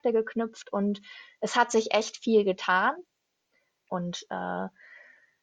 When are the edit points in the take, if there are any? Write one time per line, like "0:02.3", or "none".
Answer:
0:03.8